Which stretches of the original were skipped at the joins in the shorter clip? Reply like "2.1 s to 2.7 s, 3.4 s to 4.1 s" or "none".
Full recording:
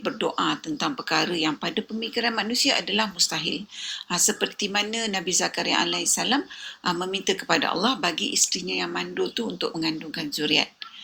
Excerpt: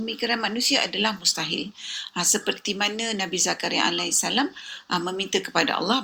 none